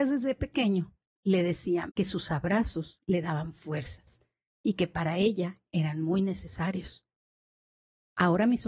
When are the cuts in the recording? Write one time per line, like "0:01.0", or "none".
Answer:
0:01.9

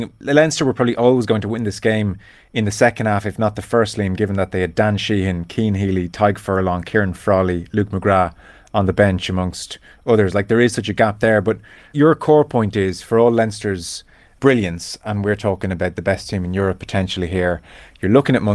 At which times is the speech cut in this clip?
none

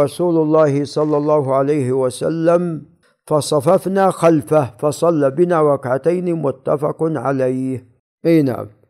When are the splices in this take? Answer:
none

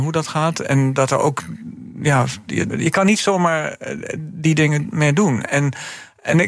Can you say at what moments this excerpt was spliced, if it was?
0:02.7

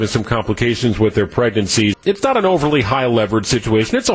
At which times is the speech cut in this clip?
0:01.9

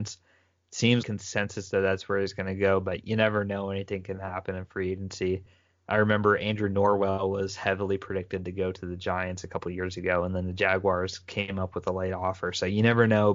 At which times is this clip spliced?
0:01.0

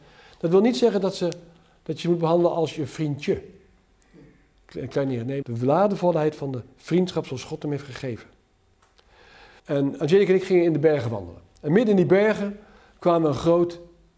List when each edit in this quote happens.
0:05.4
0:09.6

